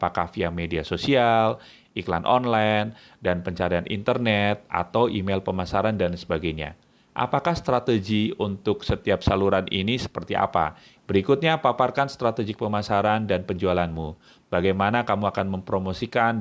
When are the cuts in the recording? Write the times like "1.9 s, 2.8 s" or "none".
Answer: 11.0 s